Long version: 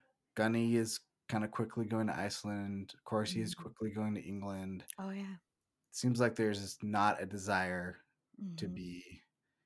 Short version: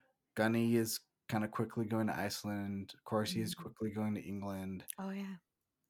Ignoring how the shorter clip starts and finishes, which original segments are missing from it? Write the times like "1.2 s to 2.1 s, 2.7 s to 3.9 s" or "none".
none